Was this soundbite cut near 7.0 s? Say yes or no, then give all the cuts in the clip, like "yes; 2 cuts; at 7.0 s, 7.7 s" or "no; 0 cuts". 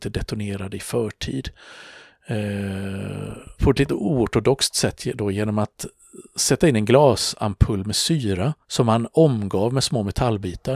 no; 2 cuts; at 3.5 s, 8.6 s